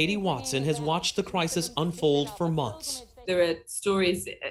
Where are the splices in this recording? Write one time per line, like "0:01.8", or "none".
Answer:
0:03.2